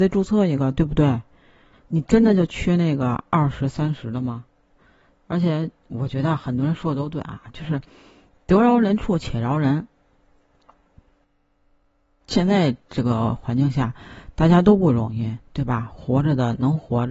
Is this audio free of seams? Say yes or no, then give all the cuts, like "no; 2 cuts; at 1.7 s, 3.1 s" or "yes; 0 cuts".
yes; 0 cuts